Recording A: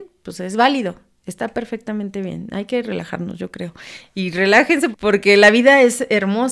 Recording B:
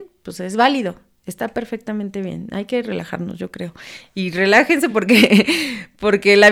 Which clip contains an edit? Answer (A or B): A